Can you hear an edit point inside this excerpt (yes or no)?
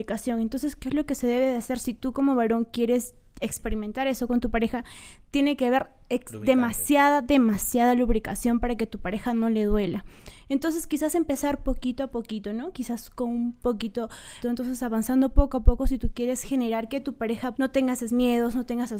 yes